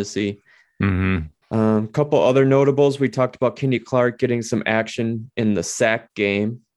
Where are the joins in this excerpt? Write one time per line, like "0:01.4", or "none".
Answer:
0:01.4